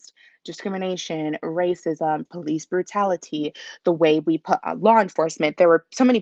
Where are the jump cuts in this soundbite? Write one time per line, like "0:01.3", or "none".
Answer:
0:02.3

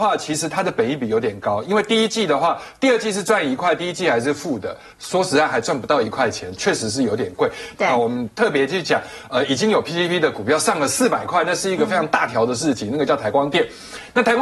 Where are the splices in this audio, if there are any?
0:04.9
0:07.7

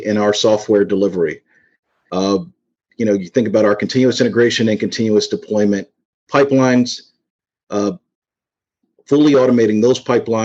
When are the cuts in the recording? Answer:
none

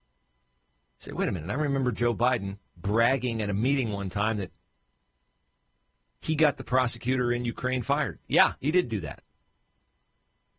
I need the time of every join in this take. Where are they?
0:02.7

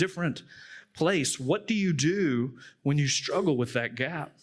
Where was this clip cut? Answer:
none

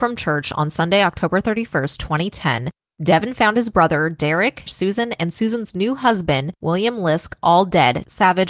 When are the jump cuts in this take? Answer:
0:04.7

